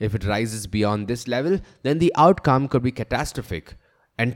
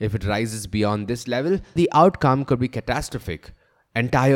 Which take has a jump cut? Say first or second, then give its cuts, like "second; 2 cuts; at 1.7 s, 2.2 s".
second; 1 cut; at 1.8 s